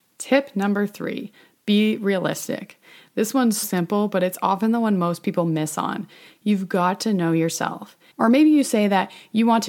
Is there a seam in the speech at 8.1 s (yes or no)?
yes